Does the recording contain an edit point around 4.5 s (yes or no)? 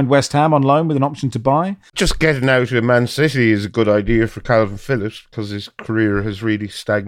no